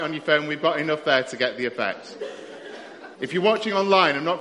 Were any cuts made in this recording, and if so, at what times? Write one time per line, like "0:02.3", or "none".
0:03.2